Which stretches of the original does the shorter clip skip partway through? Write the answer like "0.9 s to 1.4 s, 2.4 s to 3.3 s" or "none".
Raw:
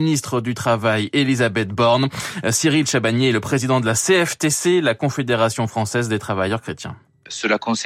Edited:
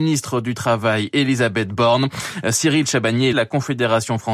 3.3 s to 4.8 s